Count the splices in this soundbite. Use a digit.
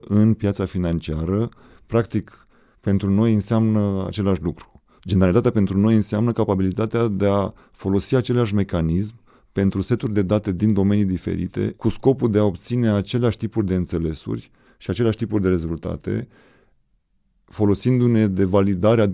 2